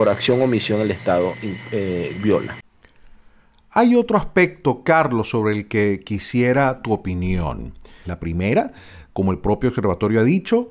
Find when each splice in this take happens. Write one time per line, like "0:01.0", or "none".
0:08.0